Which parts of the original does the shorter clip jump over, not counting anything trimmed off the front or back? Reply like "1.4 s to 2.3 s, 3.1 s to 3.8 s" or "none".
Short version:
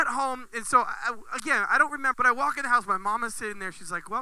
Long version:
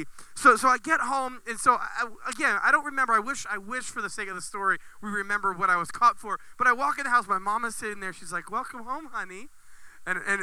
3.1 s to 6.5 s